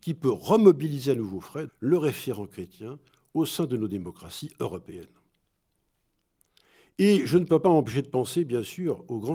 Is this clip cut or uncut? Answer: cut